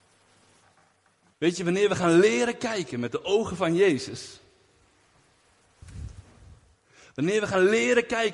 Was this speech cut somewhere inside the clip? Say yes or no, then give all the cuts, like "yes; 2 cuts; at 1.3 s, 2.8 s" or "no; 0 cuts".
yes; 1 cut; at 1.3 s